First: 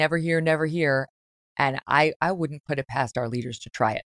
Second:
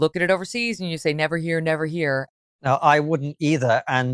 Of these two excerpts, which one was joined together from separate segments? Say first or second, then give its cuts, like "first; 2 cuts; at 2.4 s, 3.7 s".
second; 1 cut; at 2.5 s